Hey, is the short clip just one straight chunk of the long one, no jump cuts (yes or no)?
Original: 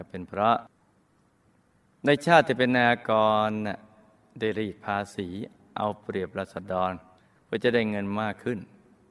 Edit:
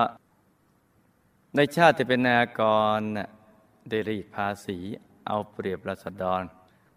yes